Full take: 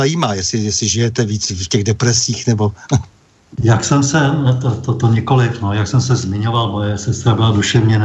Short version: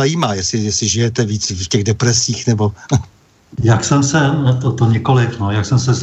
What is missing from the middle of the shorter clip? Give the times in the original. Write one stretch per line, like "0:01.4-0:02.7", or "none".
0:04.6-0:04.9